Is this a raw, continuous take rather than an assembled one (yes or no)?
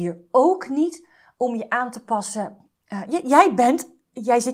yes